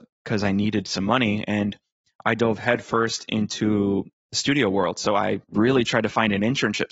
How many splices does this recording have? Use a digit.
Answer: 1